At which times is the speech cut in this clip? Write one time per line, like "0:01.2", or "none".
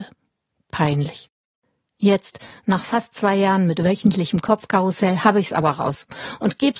none